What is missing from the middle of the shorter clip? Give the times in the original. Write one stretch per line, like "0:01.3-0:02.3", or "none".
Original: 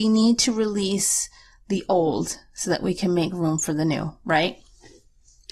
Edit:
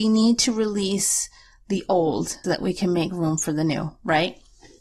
0:02.4-0:02.6